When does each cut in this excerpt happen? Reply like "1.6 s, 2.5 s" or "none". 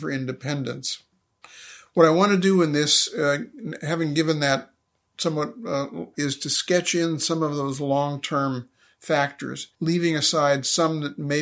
6.1 s, 9.7 s